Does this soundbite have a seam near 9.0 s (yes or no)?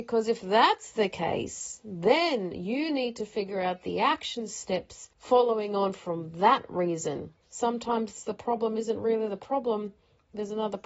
no